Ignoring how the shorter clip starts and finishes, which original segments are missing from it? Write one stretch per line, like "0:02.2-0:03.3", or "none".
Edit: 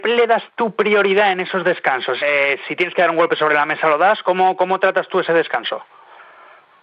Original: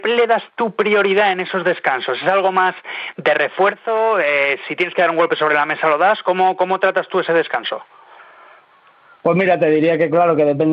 0:02.2-0:04.2